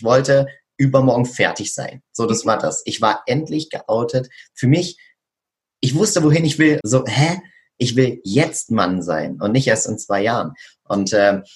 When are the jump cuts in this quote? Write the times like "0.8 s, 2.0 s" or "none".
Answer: 6.8 s